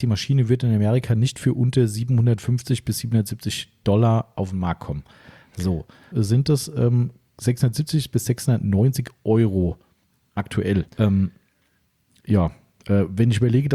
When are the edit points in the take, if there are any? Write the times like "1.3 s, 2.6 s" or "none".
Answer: 6.1 s, 10.9 s